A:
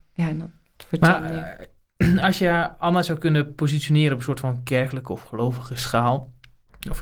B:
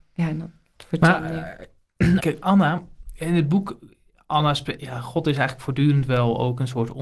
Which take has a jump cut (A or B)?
B